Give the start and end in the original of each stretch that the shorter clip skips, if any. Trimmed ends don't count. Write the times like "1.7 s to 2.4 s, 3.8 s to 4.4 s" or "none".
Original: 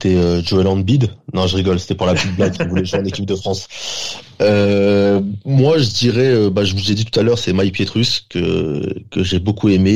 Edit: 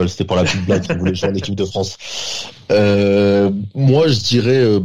none